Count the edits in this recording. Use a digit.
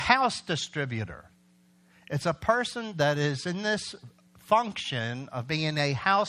0